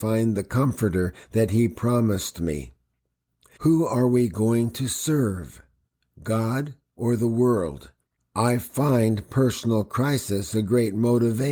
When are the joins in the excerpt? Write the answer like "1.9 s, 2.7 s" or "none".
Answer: 3.6 s, 8.1 s